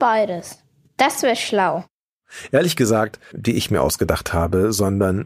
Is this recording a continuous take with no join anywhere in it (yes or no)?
no